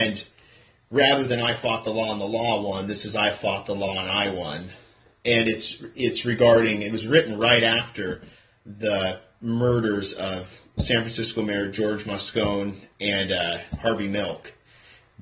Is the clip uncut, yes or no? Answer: yes